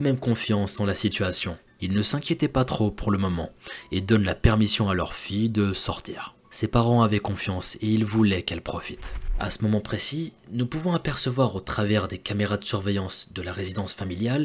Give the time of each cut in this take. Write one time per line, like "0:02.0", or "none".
none